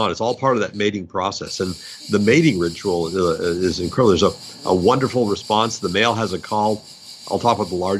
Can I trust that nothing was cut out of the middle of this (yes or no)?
yes